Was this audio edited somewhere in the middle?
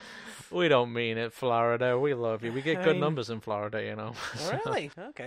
no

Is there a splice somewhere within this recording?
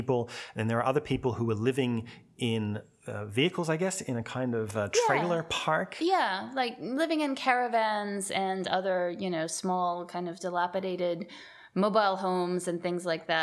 no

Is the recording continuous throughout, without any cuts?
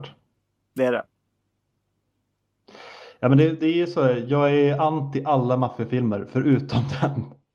yes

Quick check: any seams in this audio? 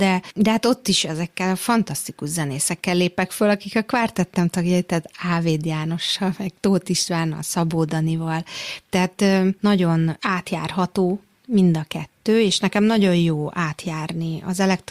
no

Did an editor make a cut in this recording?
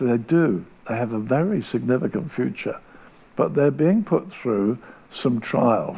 no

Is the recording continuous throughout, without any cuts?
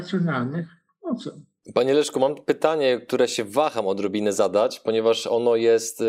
yes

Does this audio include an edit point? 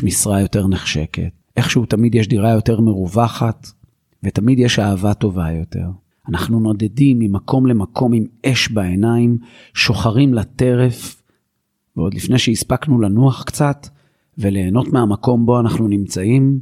no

